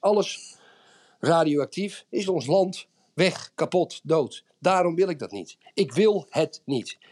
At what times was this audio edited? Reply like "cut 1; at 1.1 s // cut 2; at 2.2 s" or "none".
none